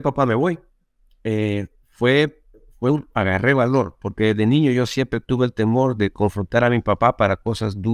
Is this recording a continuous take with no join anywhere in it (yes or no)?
yes